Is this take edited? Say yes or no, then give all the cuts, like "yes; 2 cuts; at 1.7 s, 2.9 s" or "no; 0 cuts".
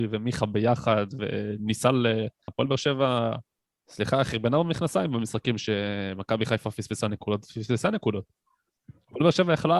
yes; 1 cut; at 2.5 s